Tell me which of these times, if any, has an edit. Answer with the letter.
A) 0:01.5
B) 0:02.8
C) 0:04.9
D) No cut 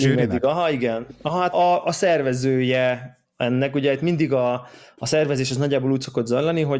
A